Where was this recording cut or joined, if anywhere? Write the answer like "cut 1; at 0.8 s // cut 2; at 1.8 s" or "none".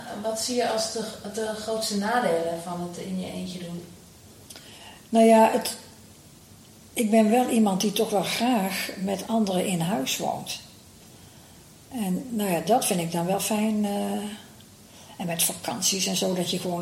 none